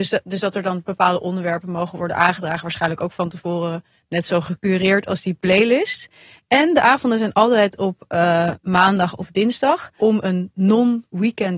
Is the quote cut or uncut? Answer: uncut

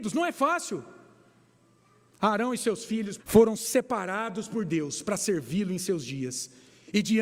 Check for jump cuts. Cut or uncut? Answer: cut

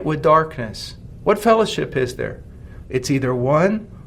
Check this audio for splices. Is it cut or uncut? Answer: cut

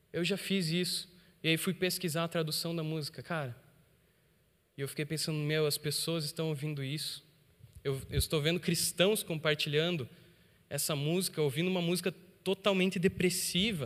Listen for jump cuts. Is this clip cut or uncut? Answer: uncut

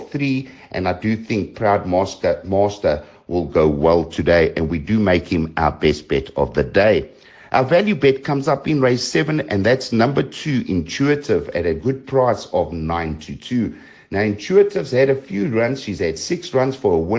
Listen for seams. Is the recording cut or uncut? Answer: uncut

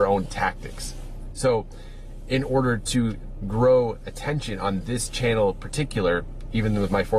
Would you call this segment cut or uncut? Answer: cut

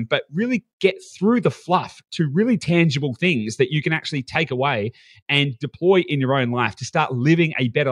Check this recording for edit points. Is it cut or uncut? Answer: uncut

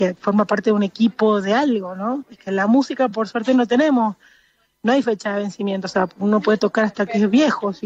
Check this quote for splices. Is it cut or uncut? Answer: uncut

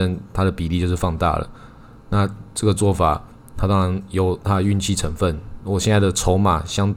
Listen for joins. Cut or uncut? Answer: uncut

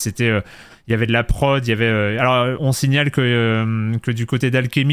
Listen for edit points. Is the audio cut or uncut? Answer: cut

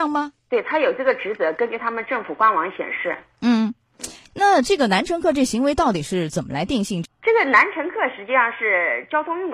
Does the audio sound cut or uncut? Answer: cut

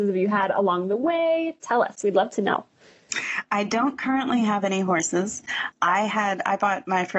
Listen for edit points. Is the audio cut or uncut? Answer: uncut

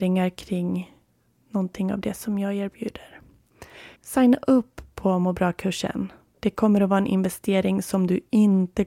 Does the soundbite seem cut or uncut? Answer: cut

